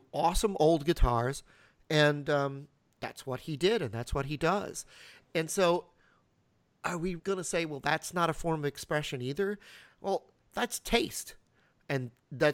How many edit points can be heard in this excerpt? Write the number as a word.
two